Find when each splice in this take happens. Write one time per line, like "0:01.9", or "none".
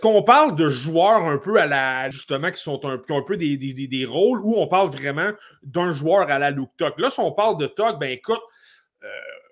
0:02.1